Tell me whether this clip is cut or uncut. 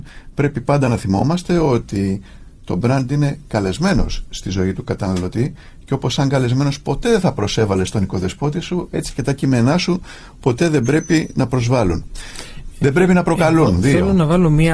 uncut